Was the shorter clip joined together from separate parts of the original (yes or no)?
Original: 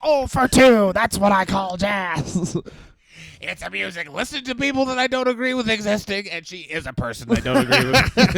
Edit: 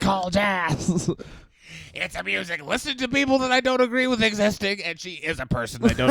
no